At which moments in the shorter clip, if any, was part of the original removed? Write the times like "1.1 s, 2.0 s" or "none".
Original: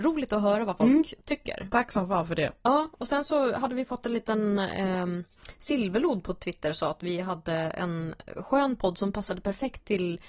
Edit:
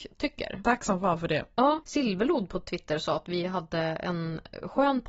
1.8 s